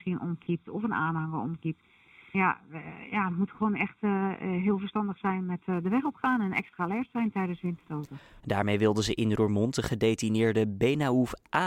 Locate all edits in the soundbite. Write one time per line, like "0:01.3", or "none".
0:08.4